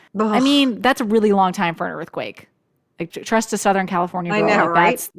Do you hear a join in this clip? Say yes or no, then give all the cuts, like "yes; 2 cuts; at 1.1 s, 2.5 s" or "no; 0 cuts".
yes; 1 cut; at 3.1 s